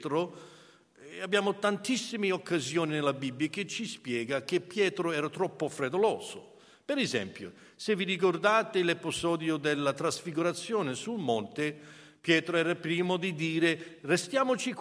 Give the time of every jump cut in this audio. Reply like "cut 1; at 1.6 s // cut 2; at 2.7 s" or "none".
none

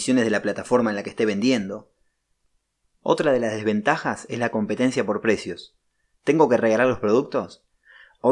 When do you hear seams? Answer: none

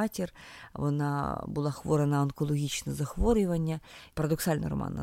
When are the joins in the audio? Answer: cut 1; at 4.1 s

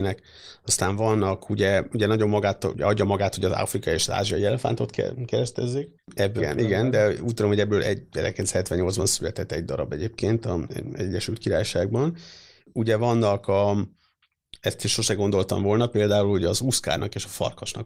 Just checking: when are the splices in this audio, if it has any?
cut 1; at 6.4 s

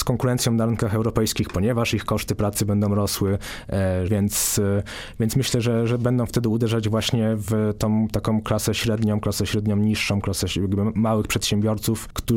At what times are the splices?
cut 1; at 4.1 s

